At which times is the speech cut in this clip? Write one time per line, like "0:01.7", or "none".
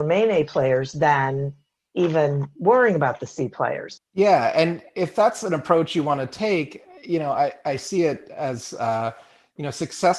0:04.0